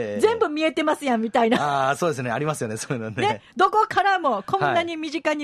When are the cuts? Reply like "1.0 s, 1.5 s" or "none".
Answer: none